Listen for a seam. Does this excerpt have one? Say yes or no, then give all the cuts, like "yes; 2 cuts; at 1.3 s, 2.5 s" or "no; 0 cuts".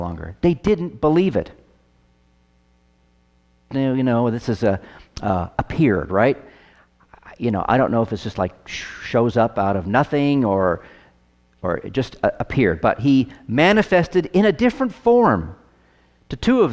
yes; 1 cut; at 3.7 s